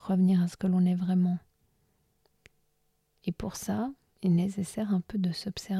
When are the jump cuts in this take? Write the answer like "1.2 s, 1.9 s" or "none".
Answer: 4.1 s

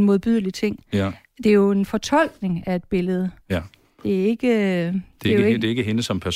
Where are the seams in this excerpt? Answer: none

